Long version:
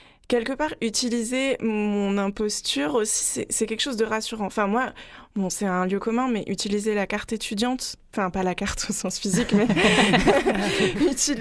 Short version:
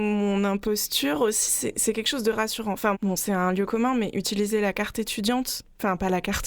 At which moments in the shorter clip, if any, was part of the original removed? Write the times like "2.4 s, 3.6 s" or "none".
2.9 s